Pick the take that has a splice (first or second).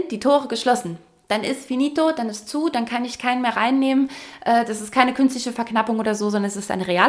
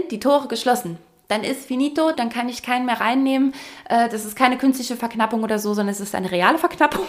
second